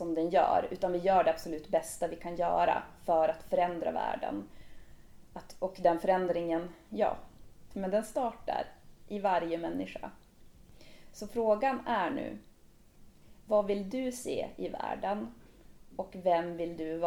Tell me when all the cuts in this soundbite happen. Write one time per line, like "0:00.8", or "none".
0:07.7